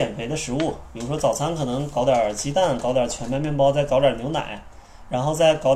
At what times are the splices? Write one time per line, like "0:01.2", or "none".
none